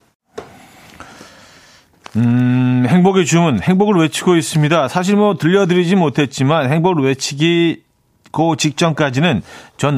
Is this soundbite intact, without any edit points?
yes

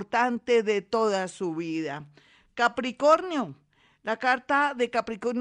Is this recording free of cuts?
yes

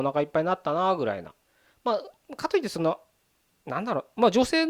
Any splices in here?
no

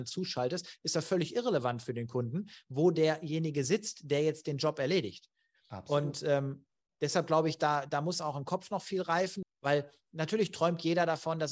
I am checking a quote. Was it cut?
yes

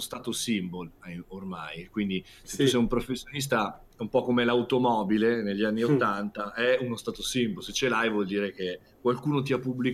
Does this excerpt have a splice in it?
no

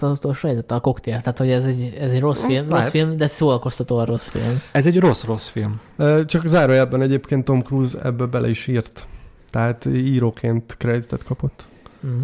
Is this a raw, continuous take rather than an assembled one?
yes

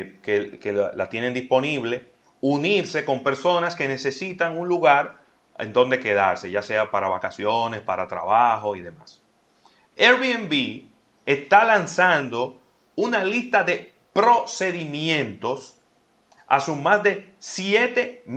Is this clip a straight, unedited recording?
yes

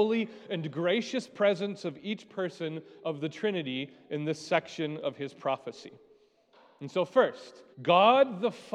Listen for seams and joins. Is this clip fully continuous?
no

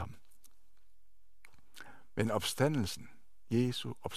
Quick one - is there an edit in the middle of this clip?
no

